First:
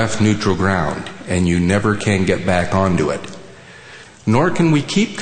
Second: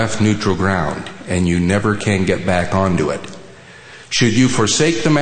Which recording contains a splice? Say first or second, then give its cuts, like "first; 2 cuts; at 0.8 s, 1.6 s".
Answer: first; 1 cut; at 4.0 s